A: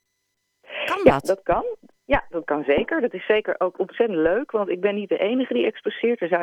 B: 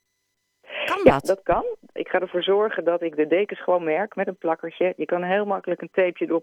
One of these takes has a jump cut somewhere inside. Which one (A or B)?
B